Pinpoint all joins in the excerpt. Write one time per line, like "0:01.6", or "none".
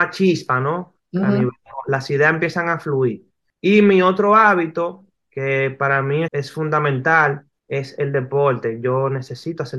0:06.3

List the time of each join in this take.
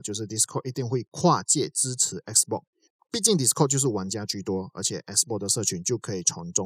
none

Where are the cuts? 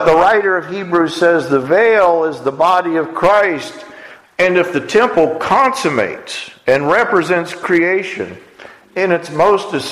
0:04.2

